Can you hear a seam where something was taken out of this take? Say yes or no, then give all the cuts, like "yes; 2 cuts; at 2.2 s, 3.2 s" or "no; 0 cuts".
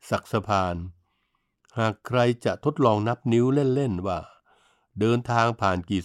no; 0 cuts